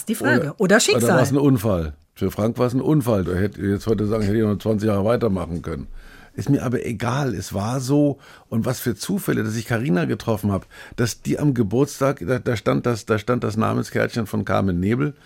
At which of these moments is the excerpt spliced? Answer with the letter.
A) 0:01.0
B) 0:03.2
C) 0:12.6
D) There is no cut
B